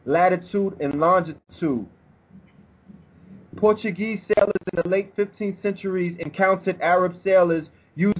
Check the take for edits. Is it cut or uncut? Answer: cut